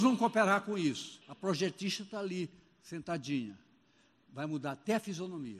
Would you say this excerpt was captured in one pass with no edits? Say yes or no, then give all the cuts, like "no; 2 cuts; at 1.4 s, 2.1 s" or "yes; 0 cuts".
no; 1 cut; at 1.2 s